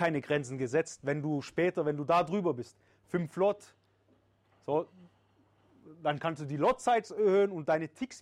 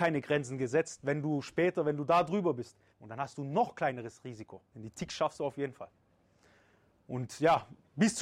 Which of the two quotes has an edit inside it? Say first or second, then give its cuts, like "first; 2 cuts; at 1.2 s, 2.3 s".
second; 2 cuts; at 2.9 s, 4.7 s